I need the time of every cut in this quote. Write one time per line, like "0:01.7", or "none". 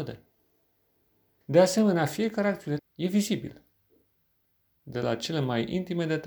0:01.4
0:02.8